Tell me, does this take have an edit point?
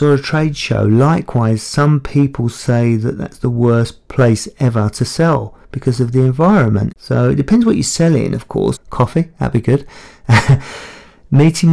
yes; 2 cuts; at 6.9 s, 8.8 s

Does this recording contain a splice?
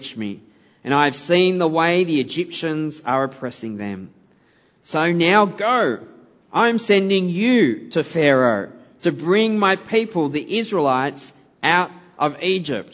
no; 0 cuts

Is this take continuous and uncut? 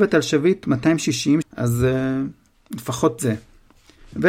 no; 1 cut; at 1.4 s

